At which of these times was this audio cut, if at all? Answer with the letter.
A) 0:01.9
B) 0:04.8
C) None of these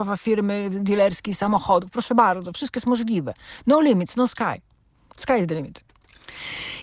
C